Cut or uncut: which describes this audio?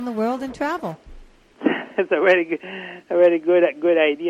uncut